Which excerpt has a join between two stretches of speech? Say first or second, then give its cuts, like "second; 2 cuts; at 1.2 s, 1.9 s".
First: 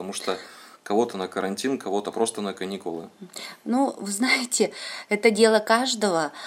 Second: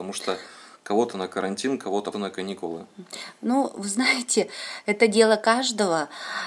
second; 1 cut; at 2.1 s